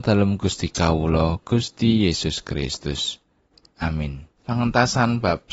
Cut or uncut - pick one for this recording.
cut